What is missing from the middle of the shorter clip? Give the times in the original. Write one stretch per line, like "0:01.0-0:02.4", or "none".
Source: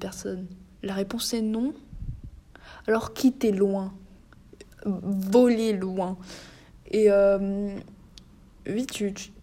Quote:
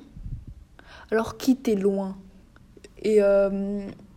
0:04.7-0:06.8